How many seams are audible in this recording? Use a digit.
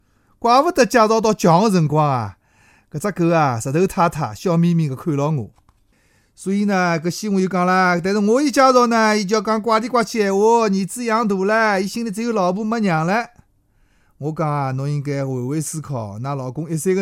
0